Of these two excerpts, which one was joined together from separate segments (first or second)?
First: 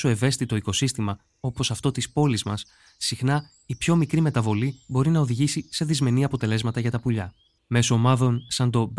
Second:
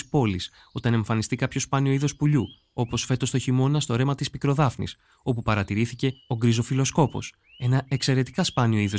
first